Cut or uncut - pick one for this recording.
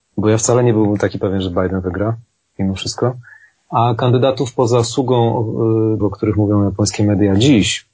cut